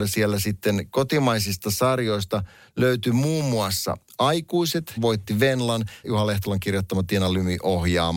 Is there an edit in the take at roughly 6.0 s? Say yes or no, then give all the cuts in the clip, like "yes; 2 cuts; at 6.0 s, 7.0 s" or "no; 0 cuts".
yes; 2 cuts; at 5.0 s, 6.0 s